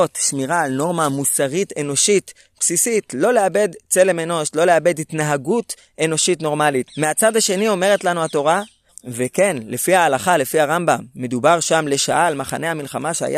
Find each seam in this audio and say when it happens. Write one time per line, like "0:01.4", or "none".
0:06.9
0:08.9